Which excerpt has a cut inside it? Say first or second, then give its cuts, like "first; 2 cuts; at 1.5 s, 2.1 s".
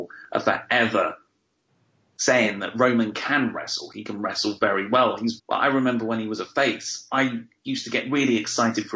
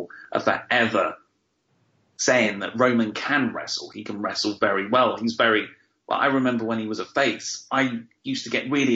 first; 1 cut; at 5.4 s